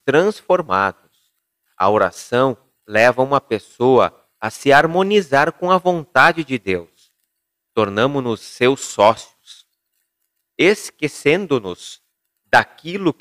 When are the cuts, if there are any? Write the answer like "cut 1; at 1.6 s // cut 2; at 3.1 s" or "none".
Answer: none